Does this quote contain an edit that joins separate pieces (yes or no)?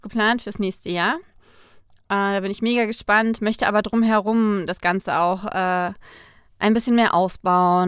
no